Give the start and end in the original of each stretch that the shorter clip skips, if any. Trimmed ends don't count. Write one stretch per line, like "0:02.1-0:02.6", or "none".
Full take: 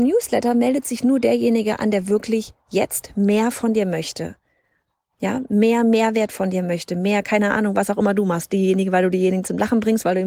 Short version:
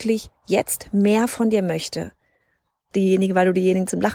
0:05.1-0:08.5